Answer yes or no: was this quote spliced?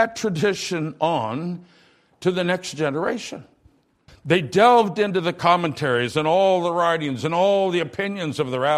yes